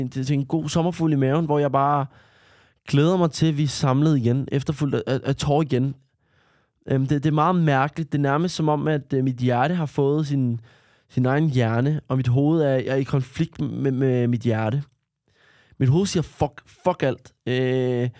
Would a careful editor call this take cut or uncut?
uncut